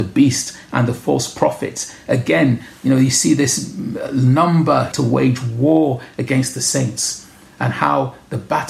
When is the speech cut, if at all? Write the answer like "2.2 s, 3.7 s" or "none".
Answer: 4.9 s